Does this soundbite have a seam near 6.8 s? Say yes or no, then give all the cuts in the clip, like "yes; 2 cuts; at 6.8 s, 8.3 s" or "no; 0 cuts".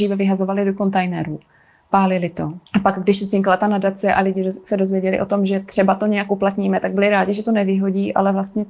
no; 1 cut; at 2.7 s